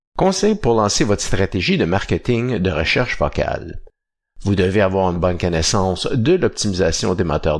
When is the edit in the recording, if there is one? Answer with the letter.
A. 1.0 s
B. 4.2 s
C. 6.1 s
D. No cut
B